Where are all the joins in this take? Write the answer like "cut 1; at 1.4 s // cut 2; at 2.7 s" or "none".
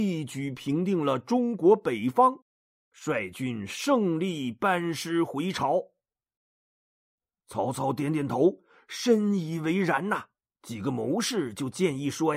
cut 1; at 6.4 s // cut 2; at 10.5 s